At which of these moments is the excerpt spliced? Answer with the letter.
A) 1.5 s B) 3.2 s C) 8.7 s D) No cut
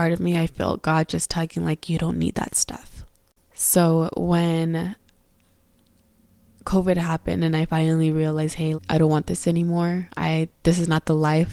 C